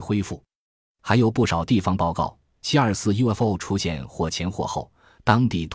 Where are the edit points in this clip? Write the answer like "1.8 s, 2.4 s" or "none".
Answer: none